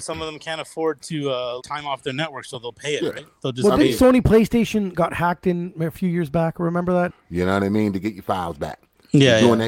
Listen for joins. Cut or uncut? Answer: cut